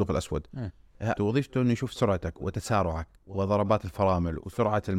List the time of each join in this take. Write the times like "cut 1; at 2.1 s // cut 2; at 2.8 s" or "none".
cut 1; at 1.2 s // cut 2; at 3.2 s